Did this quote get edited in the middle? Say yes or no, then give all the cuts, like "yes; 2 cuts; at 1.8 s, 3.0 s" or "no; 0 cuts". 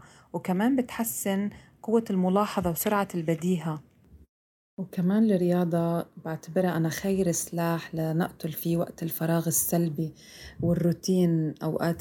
no; 0 cuts